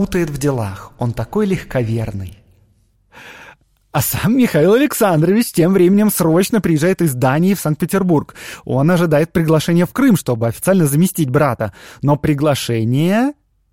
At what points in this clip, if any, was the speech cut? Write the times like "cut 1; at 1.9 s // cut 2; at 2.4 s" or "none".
none

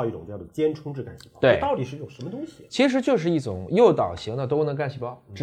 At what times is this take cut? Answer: none

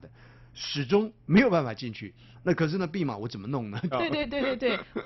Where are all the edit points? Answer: cut 1; at 2.3 s // cut 2; at 3.9 s

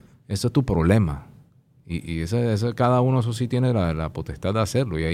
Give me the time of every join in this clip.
none

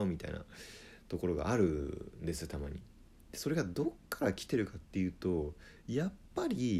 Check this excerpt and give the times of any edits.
none

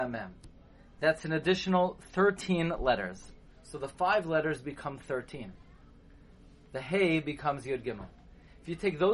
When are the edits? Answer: none

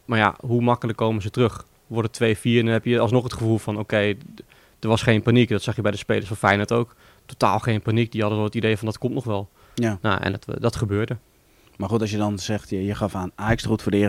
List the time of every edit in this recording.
none

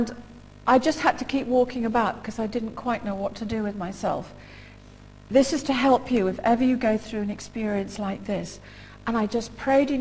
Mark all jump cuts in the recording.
none

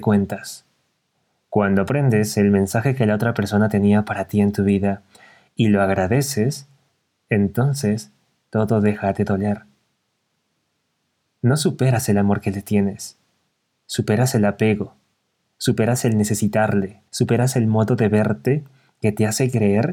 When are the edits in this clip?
cut 1; at 17.1 s

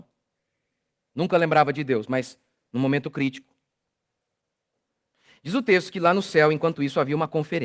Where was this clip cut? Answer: none

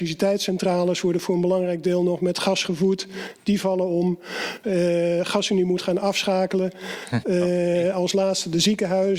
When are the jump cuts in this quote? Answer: cut 1; at 4.6 s // cut 2; at 7.2 s

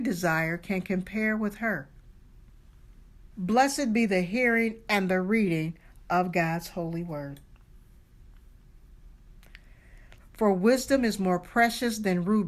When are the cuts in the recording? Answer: cut 1; at 3.3 s // cut 2; at 10.2 s

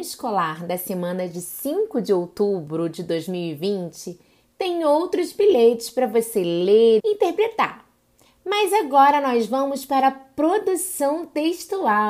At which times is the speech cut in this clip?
cut 1; at 7.0 s

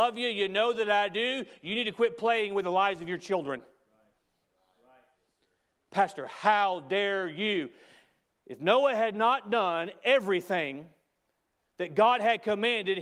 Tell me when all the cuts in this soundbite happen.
none

